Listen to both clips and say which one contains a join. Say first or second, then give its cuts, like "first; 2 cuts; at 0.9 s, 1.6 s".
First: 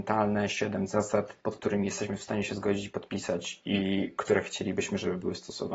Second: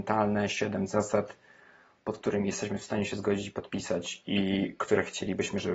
first; 1 cut; at 1.4 s